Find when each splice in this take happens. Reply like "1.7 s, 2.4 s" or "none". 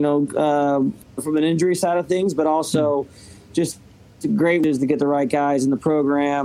1.0 s